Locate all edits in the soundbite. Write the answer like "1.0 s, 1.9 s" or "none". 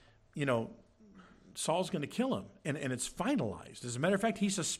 1.5 s